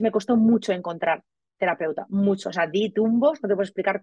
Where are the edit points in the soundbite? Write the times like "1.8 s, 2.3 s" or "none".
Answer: none